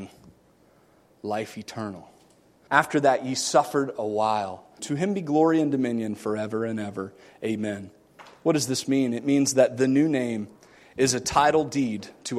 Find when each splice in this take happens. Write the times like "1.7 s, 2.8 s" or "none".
2.7 s, 4.8 s